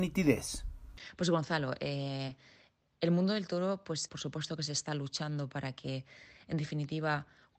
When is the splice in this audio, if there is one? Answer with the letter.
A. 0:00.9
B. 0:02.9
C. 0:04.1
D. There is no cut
C